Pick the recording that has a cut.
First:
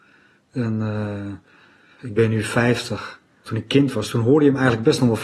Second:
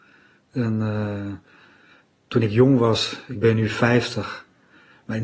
first; 2 cuts; at 2.0 s, 3.5 s

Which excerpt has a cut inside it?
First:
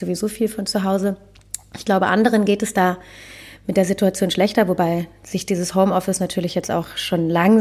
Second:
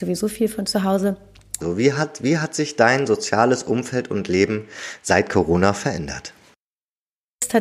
second; 1 cut; at 1.6 s

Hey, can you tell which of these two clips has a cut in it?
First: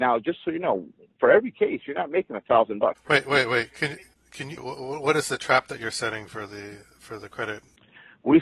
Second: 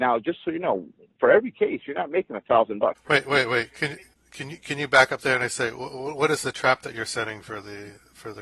first; 1 cut; at 4.6 s

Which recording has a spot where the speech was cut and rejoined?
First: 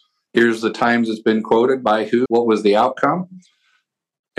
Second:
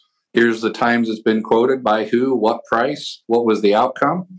first; 1 cut; at 2.3 s

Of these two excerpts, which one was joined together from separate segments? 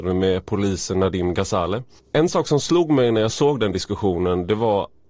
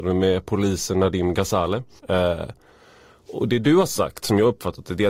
second; 1 cut; at 2.0 s

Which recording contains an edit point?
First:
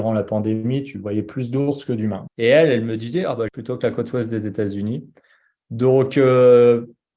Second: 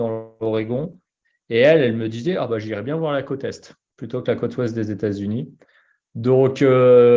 first; 2 cuts; at 2.3 s, 3.5 s

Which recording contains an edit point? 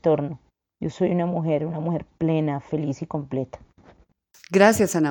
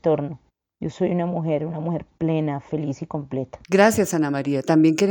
second; 1 cut; at 3.6 s

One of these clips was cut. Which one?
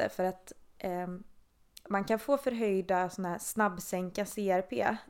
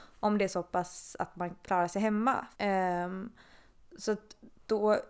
second; 1 cut; at 2.5 s

